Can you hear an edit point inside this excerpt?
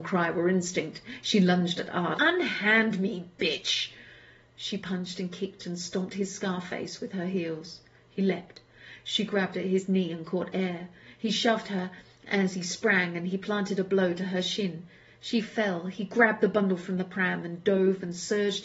yes; 1 cut; at 2.2 s

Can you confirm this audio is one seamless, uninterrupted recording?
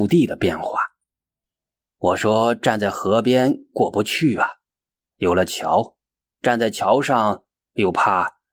no; 1 cut; at 1.9 s

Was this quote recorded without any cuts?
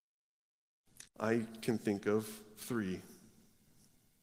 no; 1 cut; at 1.1 s

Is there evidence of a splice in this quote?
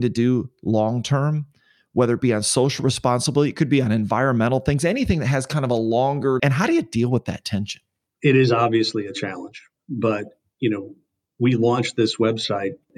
yes; 1 cut; at 6.4 s

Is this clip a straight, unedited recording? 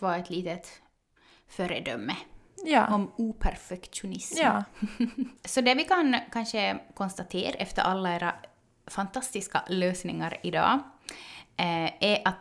no; 1 cut; at 5.4 s

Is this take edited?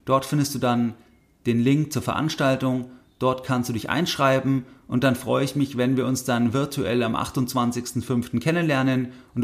no; 0 cuts

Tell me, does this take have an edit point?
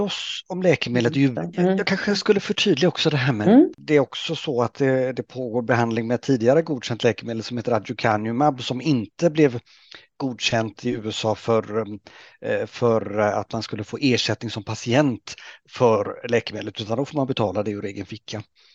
yes; 2 cuts; at 1.4 s, 3.7 s

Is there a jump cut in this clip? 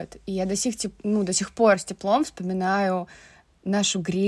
yes; 1 cut; at 1.0 s

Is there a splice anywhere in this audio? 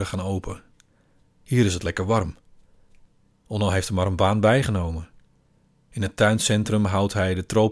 no; 0 cuts

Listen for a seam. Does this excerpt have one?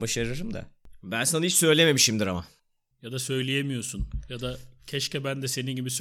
yes; 1 cut; at 2.9 s

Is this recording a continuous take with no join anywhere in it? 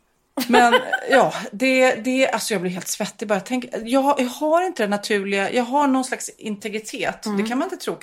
yes; 0 cuts

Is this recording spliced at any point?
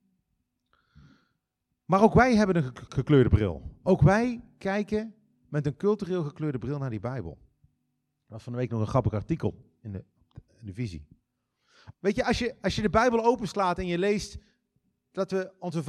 yes; 2 cuts; at 10.5 s, 11.9 s

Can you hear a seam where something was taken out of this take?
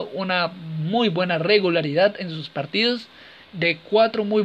yes; 1 cut; at 3.4 s

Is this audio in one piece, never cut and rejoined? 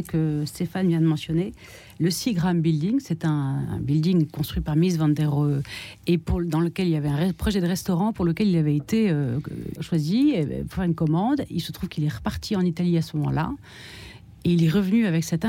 no; 1 cut; at 9.8 s

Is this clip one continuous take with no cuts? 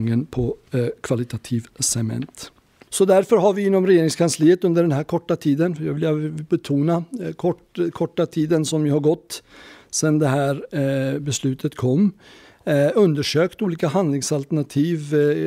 yes; 0 cuts

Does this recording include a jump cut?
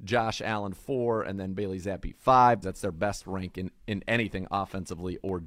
yes; 1 cut; at 2.6 s

